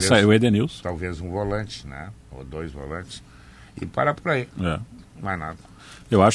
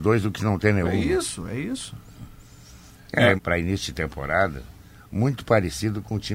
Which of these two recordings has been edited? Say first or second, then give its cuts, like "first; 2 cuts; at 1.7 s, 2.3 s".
second; 1 cut; at 3.4 s